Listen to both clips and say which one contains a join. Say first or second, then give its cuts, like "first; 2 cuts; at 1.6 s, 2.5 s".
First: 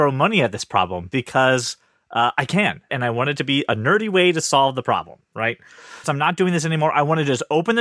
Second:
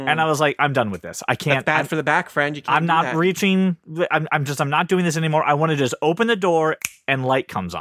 first; 2 cuts; at 2.9 s, 6.0 s